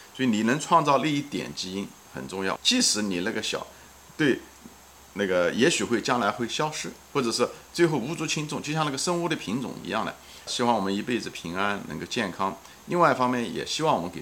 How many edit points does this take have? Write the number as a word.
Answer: two